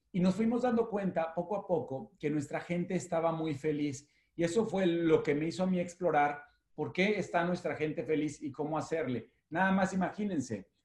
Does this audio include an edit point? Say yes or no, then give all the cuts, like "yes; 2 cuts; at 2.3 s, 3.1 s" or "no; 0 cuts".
no; 0 cuts